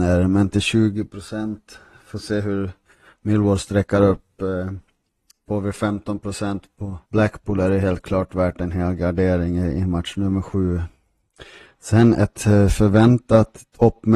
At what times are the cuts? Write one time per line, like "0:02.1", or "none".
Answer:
0:07.0